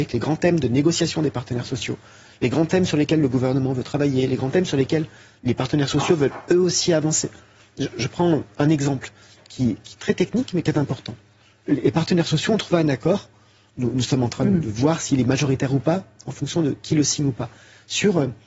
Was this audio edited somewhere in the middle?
no; 0 cuts

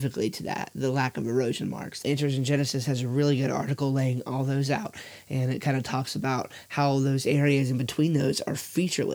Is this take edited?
yes; 1 cut; at 2.0 s

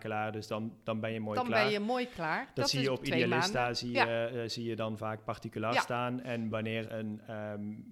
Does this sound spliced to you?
yes; 1 cut; at 6.8 s

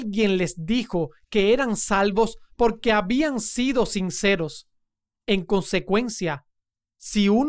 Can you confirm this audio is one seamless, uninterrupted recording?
yes; 0 cuts

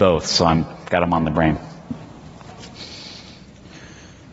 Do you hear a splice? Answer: no; 0 cuts

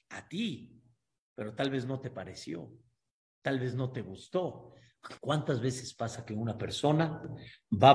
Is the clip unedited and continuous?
no; 1 cut; at 5.2 s

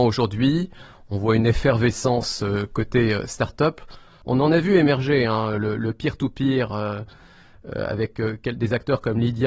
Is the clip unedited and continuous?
yes; 0 cuts

